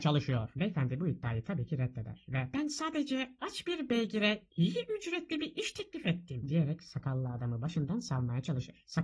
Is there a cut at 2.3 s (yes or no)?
no